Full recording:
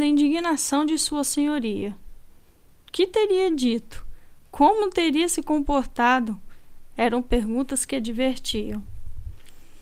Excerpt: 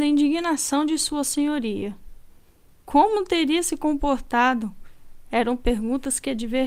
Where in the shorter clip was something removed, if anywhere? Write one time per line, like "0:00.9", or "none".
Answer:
0:02.9